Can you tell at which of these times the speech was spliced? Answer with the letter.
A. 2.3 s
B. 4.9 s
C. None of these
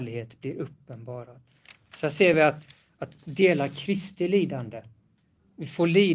C